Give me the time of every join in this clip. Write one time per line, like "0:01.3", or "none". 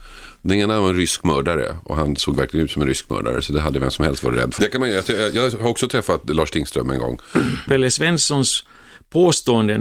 0:04.6
0:07.7